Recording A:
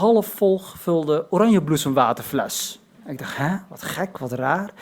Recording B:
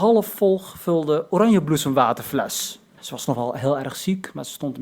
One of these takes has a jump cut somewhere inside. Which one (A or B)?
B